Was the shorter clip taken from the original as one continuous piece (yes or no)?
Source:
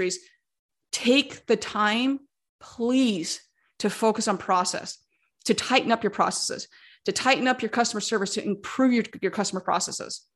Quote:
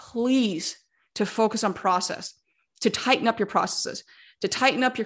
yes